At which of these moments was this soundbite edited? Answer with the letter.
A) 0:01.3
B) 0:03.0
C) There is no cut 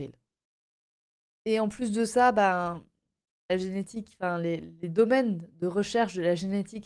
A